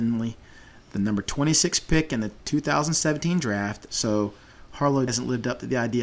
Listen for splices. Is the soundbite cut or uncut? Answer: cut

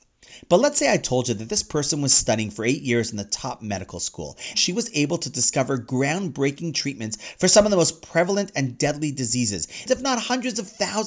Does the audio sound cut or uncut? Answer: cut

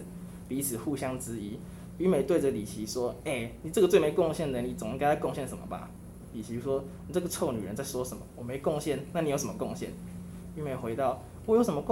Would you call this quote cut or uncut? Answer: uncut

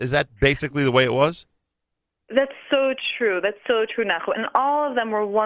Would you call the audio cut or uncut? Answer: uncut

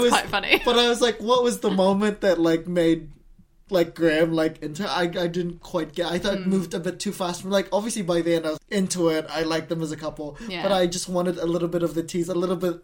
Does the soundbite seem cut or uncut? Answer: cut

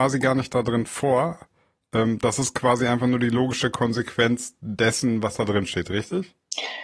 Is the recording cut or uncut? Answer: uncut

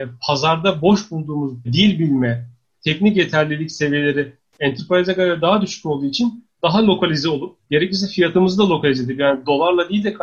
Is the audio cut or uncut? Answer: cut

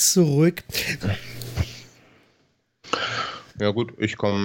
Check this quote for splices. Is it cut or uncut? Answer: cut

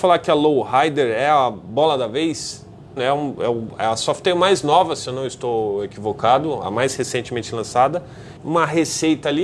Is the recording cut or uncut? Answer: cut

